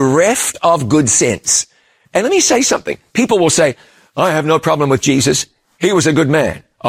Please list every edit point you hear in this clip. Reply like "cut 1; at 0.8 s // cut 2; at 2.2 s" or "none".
cut 1; at 2.1 s